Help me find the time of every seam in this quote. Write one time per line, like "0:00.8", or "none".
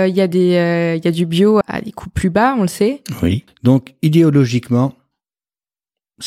0:01.6
0:03.5